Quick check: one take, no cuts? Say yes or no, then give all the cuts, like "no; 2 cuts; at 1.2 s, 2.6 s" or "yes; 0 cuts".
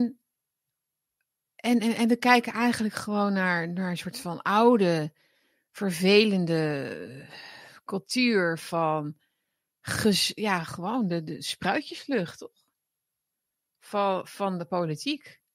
yes; 0 cuts